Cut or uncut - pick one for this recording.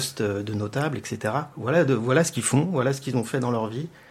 uncut